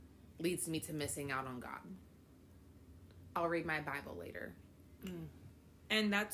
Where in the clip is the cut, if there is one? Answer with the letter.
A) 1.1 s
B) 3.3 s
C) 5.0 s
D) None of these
C